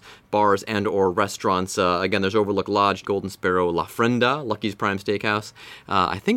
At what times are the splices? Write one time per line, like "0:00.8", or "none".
0:03.0